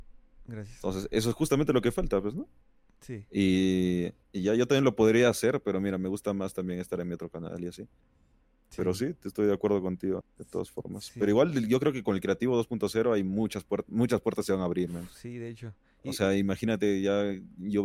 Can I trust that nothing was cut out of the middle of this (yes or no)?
no